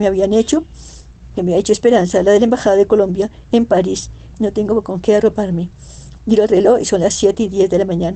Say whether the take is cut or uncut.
cut